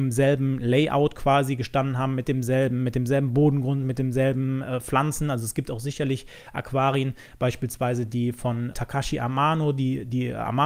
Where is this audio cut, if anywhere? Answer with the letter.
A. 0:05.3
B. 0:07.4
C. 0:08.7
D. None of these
C